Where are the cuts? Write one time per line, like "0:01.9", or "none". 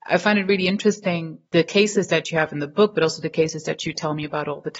0:01.4